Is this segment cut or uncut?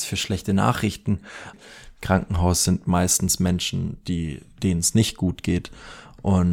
cut